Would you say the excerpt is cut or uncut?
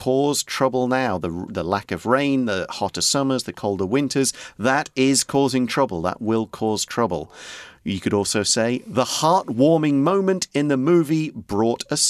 uncut